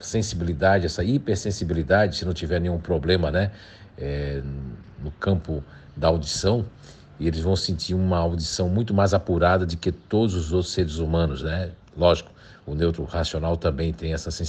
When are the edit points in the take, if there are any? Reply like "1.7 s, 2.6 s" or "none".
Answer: none